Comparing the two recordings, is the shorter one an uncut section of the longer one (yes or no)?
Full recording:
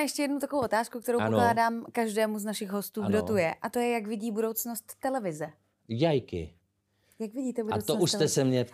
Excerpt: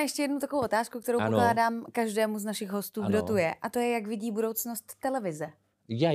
yes